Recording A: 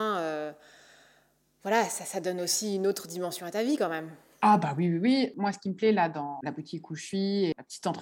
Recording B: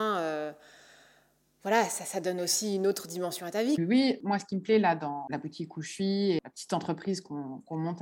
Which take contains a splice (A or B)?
B